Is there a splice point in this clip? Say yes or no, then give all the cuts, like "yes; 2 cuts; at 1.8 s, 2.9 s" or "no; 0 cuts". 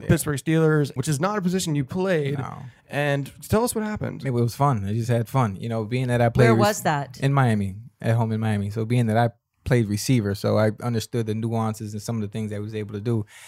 yes; 1 cut; at 1.0 s